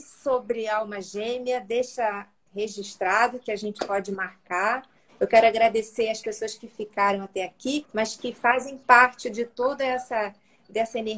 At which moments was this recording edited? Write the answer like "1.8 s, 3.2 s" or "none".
5.1 s, 7.8 s